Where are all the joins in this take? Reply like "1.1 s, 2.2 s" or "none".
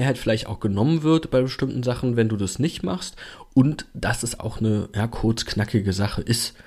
4.4 s